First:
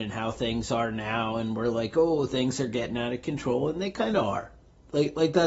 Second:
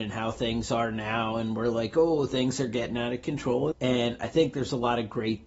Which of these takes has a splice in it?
second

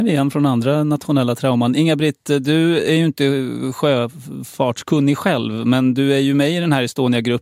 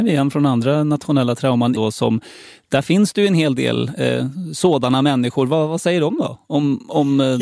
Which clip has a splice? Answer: second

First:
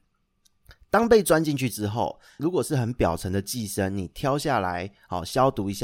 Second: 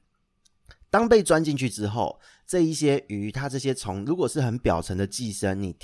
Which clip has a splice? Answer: first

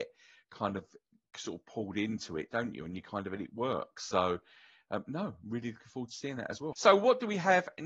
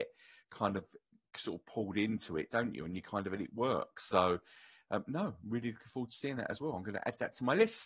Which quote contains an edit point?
first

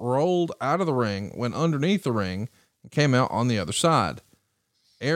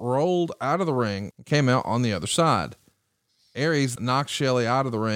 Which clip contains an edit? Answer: second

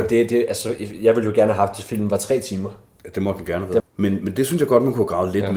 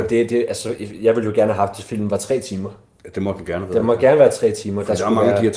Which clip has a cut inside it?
first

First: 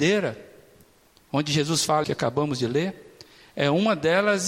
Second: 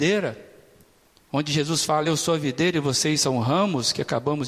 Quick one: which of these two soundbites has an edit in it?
first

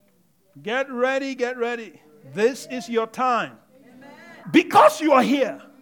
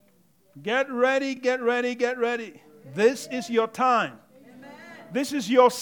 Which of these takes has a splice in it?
first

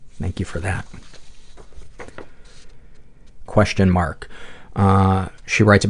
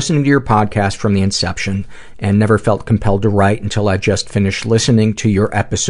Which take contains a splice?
first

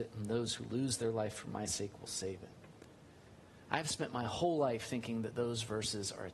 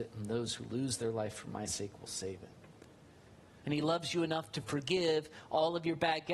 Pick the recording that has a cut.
second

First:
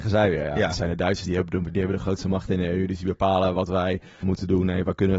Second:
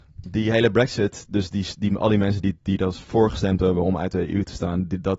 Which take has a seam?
first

